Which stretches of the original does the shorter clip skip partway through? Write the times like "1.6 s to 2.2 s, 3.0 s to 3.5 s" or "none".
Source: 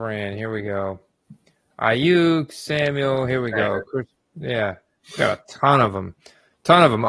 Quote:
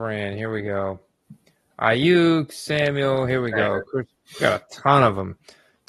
4.2 s to 5.0 s